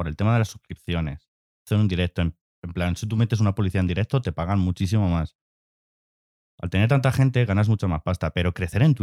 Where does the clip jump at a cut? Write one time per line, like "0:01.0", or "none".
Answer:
none